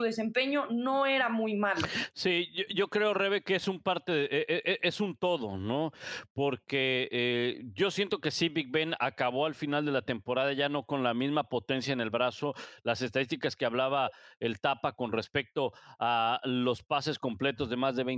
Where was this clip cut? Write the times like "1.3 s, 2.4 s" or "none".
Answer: none